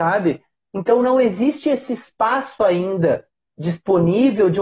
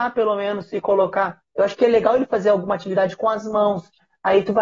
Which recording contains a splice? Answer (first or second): second